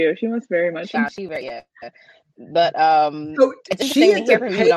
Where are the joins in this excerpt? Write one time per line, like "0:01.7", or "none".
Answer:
0:00.9